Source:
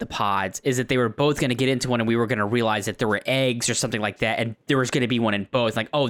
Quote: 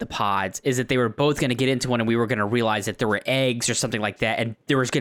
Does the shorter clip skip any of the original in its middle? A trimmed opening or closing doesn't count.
no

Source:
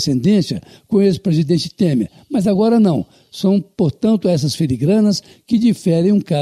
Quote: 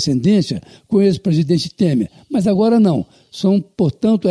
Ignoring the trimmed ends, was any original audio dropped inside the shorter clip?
no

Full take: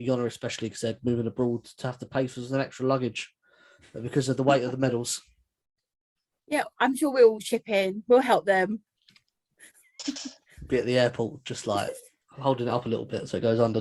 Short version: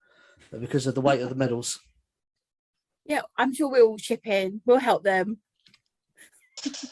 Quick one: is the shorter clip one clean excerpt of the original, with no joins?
yes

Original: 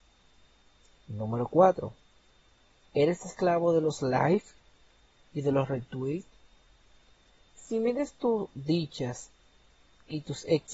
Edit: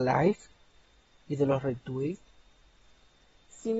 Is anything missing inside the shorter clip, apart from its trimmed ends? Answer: no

